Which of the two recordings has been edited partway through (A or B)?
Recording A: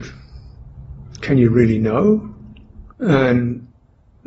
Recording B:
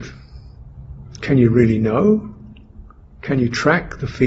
A